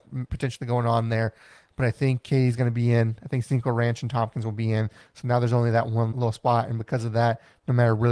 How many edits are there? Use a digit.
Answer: 1